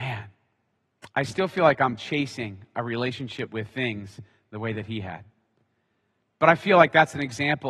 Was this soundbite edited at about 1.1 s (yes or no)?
no